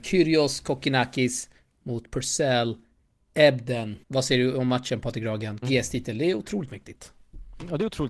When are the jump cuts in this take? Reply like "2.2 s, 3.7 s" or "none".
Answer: 4.0 s, 5.6 s

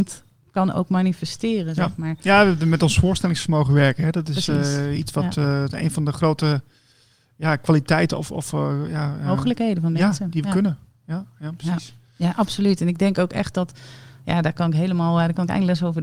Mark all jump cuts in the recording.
none

